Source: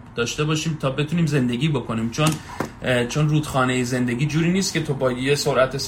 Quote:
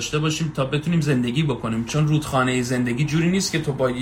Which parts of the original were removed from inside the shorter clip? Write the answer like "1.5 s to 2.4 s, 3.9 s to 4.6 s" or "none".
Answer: 2.1 s to 3.1 s